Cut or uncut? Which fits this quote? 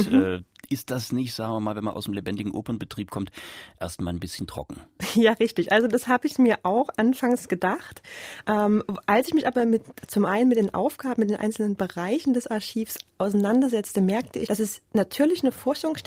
cut